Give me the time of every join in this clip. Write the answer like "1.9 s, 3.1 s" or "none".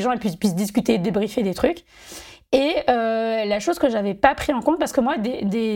none